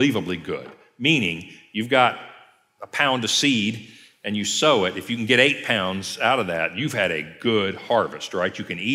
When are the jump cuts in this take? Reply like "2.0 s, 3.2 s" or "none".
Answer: none